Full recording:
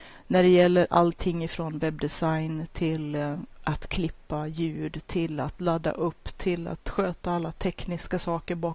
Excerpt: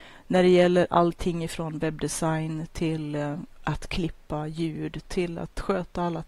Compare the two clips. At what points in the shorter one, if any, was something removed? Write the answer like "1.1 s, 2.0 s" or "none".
5.0 s